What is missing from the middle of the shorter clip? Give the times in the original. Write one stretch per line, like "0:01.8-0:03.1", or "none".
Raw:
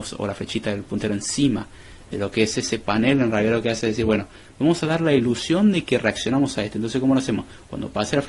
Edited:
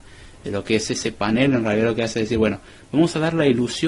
none